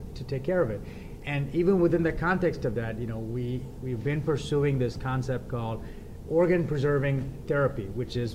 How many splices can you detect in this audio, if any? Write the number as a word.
zero